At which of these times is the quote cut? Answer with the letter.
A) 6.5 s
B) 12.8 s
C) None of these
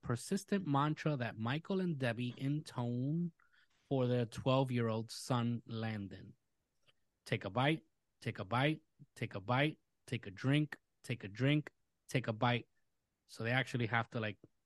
C